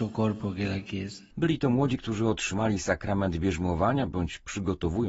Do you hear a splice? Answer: yes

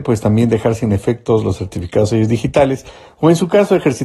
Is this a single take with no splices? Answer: yes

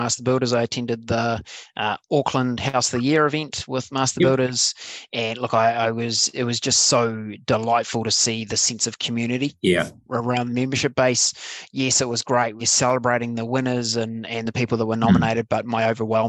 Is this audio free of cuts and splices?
yes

